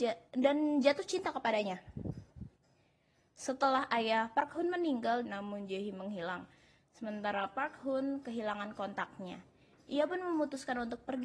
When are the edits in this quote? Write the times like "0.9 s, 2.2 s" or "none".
5.2 s

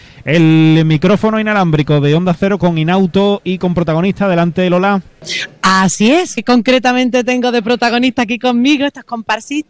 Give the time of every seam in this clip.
6.4 s

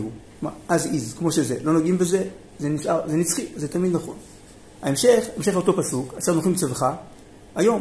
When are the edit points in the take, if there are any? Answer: none

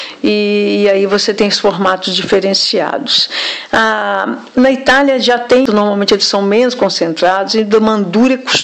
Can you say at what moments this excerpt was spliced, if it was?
4.5 s, 5.7 s, 7.5 s

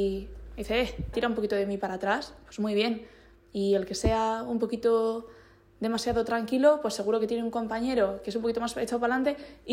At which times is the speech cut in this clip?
1.1 s

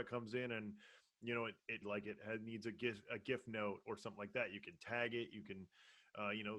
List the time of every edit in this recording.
1.8 s

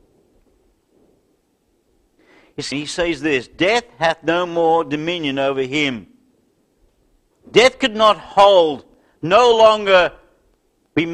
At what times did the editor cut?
2.7 s, 7.3 s

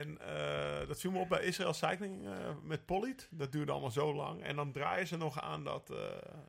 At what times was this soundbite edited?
none

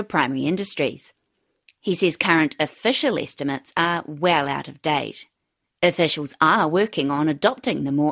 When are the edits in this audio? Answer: none

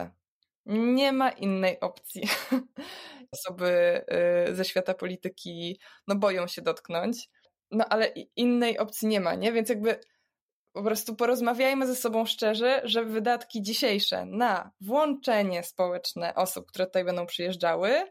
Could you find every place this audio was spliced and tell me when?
3.3 s

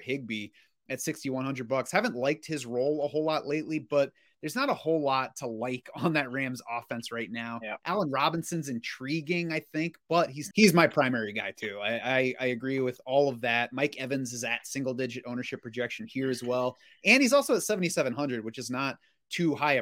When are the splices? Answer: 10.5 s

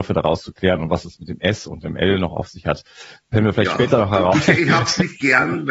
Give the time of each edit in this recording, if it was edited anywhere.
4.3 s

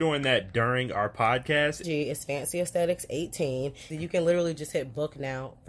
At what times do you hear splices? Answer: 1.8 s, 3.9 s

